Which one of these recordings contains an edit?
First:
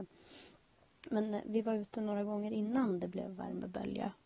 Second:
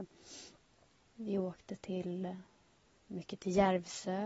second; 1 cut; at 1.0 s

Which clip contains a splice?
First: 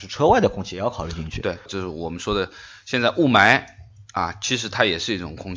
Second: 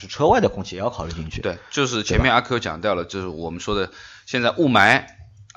first; 1 cut; at 1.7 s

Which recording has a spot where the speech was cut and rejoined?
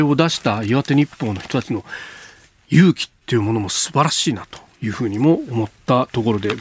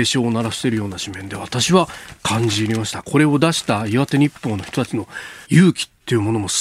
second; 1 cut; at 5.4 s

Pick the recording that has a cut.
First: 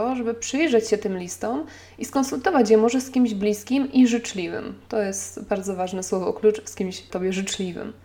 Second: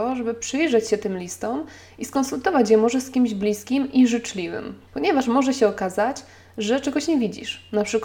second; 1 cut; at 4.9 s

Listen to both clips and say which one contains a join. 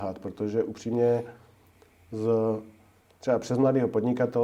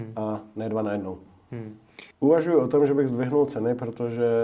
second; 1 cut; at 2.1 s

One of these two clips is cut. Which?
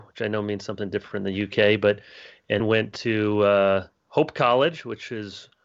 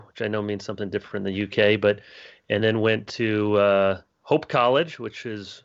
first; 1 cut; at 2.6 s

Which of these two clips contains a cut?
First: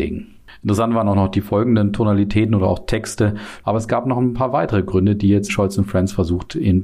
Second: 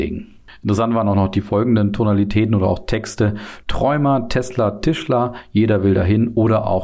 first; 2 cuts; at 3.6 s, 5.5 s

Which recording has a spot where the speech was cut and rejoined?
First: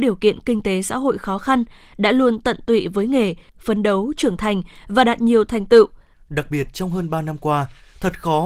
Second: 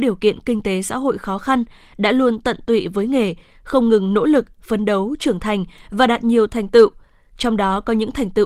first; 2 cuts; at 3.5 s, 6.1 s

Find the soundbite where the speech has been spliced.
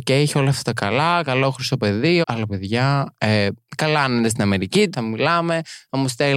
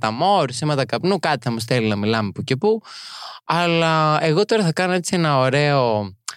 first; 2 cuts; at 2.2 s, 4.9 s

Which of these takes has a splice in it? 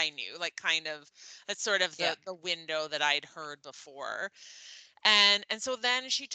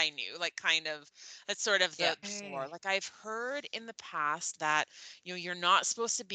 second; 1 cut; at 2.2 s

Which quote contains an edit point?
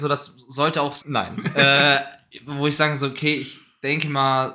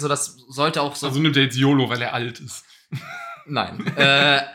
first; 1 cut; at 1.0 s

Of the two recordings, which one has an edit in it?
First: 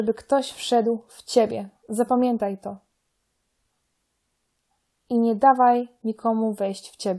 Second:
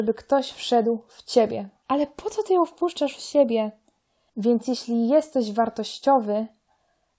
second; 2 cuts; at 1.8 s, 4.3 s

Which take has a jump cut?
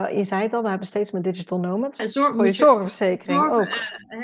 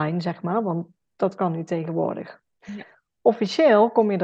first; 1 cut; at 2.0 s

